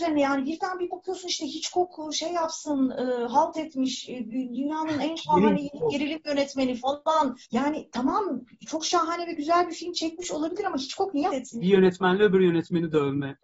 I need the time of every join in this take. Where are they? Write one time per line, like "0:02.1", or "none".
0:07.4
0:11.3